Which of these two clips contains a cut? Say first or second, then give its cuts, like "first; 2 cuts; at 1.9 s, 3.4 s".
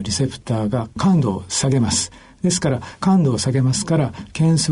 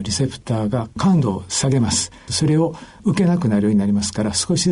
second; 1 cut; at 2.3 s